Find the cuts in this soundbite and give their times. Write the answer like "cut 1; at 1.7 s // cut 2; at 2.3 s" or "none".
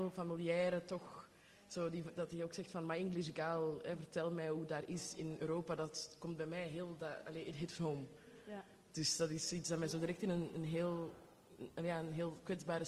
none